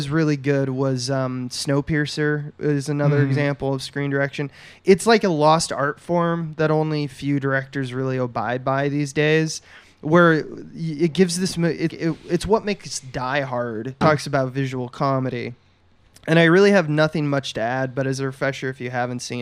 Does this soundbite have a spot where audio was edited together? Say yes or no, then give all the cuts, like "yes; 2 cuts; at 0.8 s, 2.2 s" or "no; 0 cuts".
yes; 2 cuts; at 11.9 s, 14.0 s